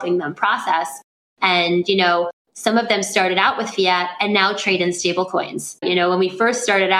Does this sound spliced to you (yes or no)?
yes